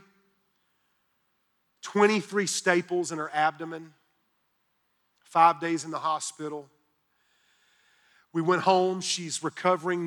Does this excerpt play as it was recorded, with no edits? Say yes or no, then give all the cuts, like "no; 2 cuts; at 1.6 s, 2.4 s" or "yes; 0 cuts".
yes; 0 cuts